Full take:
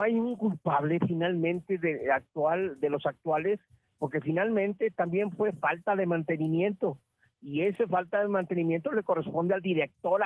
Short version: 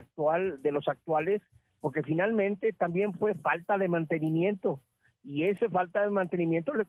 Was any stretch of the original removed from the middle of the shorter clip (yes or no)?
no